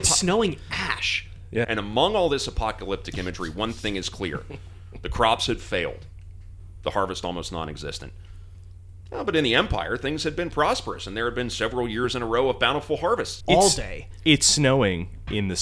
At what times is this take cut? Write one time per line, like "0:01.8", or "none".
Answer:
0:01.6
0:13.4